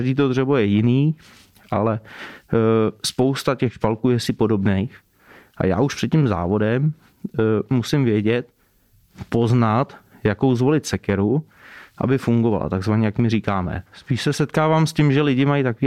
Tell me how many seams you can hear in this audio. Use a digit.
1